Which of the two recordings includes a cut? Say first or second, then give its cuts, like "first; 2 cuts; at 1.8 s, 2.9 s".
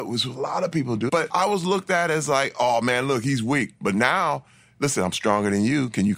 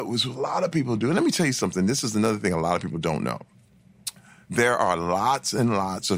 first; 1 cut; at 1.1 s